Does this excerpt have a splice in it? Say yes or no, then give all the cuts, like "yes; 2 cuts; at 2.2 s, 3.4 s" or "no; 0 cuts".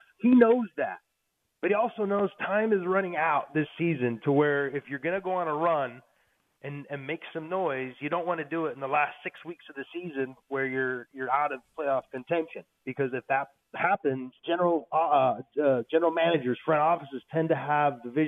yes; 1 cut; at 14.4 s